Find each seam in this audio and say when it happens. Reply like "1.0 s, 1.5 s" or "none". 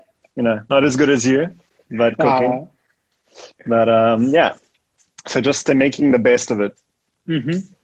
none